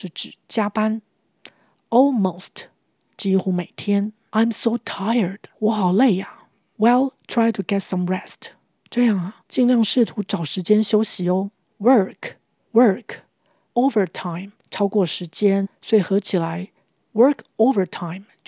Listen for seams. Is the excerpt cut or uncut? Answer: cut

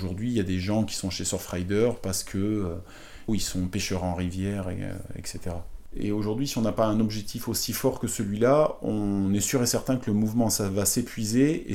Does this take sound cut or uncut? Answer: cut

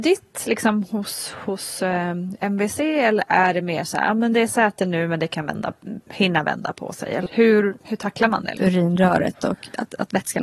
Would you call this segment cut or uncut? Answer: cut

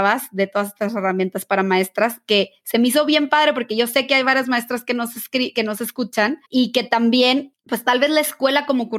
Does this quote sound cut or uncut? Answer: cut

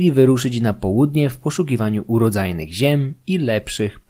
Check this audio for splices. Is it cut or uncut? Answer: uncut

